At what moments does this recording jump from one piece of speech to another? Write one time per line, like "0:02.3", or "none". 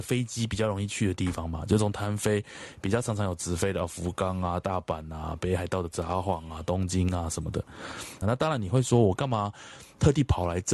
0:08.2